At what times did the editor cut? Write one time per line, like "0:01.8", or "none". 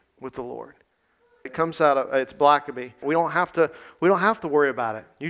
0:01.5
0:03.0